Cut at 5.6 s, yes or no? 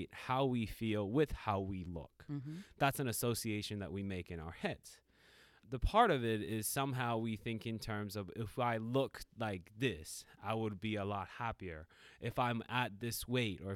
yes